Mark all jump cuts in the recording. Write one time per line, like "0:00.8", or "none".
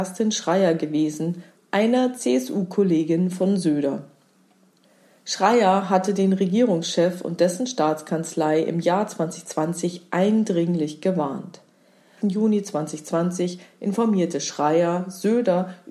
0:01.6
0:12.2